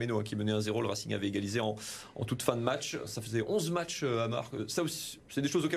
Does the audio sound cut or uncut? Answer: uncut